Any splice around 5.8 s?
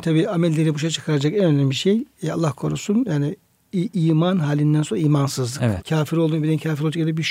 yes; 1 cut; at 5.8 s

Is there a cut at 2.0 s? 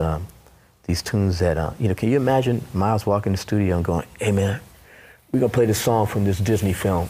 no; 0 cuts

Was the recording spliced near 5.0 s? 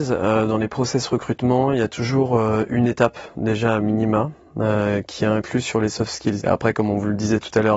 no; 1 cut; at 6.4 s

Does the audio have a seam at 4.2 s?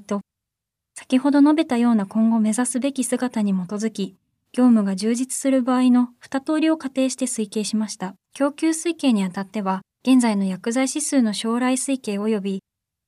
no; 2 cuts; at 8.2 s, 9.9 s

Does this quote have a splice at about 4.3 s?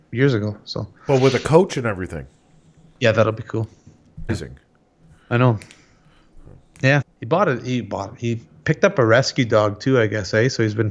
yes; 2 cuts; at 4.3 s, 7.0 s

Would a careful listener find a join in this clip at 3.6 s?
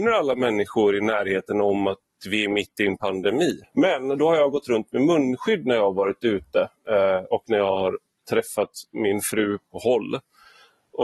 yes; 1 cut; at 3.6 s

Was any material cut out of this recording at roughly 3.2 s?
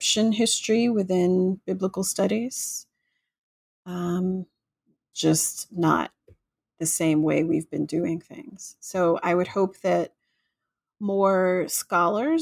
no; 1 cut; at 5.1 s

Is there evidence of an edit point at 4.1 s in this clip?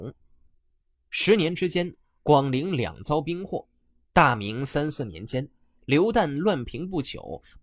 yes; 1 cut; at 4.1 s

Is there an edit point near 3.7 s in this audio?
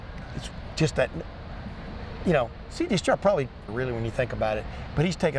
yes; 1 cut; at 3.7 s

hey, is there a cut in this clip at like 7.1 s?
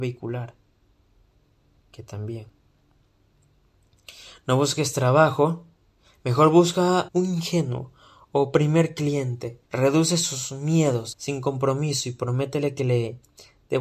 yes; 3 cuts; at 7.1 s, 9.6 s, 11.1 s

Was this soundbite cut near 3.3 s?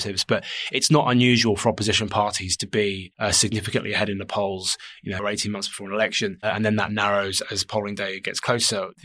no; 1 cut; at 5.2 s

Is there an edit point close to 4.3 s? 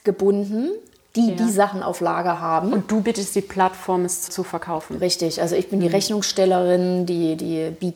yes; 1 cut; at 4.3 s

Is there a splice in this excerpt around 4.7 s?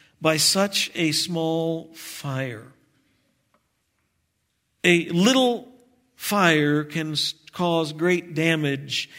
no; 0 cuts

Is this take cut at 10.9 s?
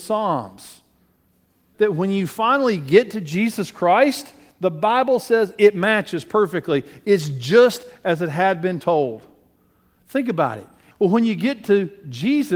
yes; 2 cuts; at 1.7 s, 10.9 s

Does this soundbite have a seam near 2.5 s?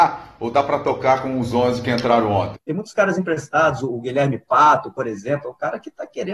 yes; 1 cut; at 2.5 s

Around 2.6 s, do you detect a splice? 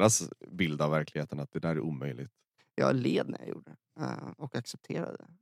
yes; 1 cut; at 2.6 s

